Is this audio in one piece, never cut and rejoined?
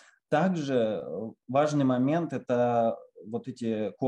yes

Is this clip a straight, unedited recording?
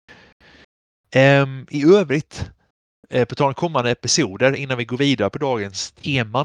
yes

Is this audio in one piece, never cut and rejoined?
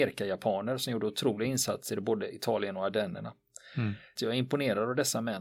no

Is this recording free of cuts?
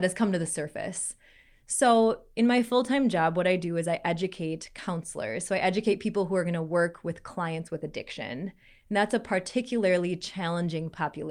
yes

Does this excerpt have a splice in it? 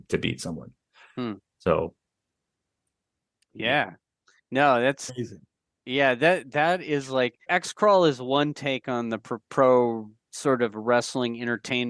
yes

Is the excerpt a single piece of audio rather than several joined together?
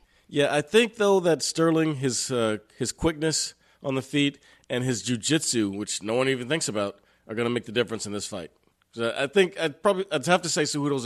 yes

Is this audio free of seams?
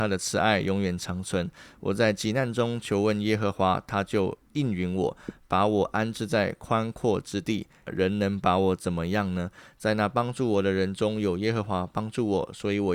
no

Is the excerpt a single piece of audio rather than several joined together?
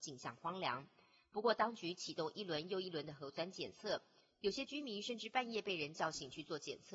yes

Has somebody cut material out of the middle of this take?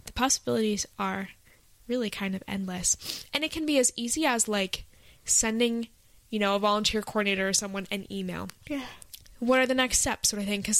yes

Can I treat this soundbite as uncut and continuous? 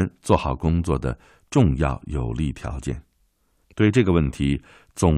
no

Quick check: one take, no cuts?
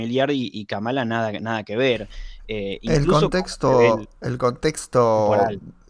yes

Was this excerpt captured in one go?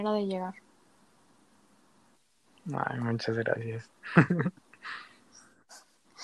yes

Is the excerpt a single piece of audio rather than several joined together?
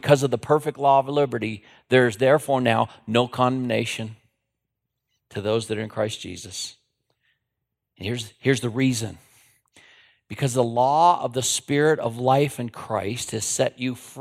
yes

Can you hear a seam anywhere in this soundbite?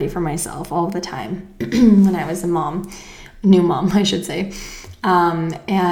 no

